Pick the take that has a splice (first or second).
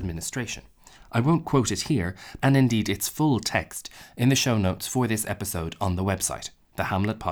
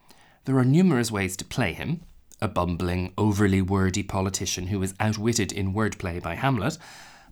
first